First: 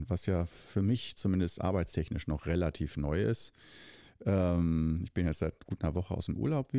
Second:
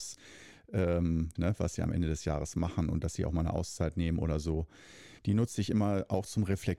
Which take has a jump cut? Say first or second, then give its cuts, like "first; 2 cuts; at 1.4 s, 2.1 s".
second; 2 cuts; at 1.4 s, 5.2 s